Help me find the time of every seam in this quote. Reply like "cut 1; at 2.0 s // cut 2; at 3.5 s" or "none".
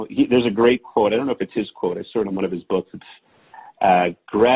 none